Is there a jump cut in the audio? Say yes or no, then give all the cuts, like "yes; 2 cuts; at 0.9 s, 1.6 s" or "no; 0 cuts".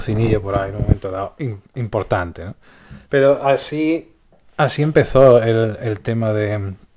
no; 0 cuts